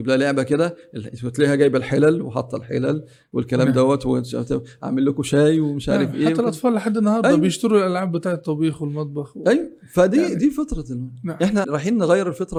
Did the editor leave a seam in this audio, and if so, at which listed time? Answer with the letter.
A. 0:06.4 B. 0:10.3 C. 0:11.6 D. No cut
C